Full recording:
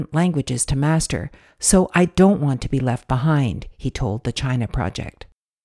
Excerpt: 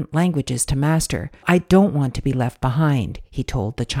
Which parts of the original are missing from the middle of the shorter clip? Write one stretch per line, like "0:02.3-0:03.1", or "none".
0:01.4-0:01.9